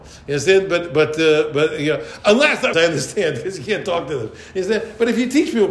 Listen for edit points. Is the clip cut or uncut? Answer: cut